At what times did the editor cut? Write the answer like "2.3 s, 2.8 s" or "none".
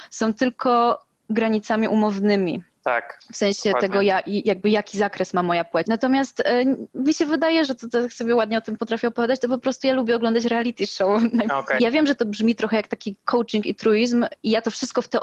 5.8 s, 7.7 s, 11.8 s